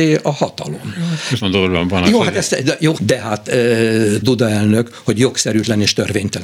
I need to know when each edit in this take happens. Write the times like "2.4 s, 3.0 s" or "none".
1.4 s, 3.0 s, 4.2 s